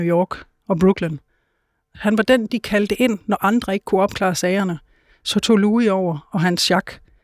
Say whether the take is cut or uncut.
uncut